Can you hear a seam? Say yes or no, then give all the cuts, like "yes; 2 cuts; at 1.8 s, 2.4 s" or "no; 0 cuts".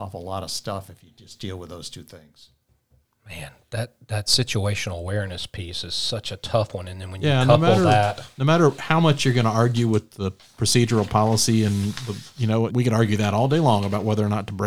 yes; 1 cut; at 12.7 s